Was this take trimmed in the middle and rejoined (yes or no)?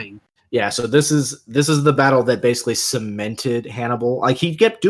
no